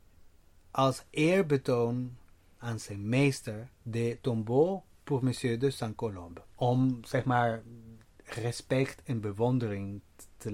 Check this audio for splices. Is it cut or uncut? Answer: cut